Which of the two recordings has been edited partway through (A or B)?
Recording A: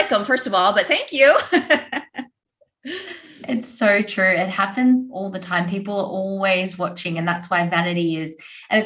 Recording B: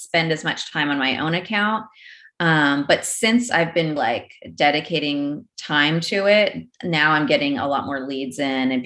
B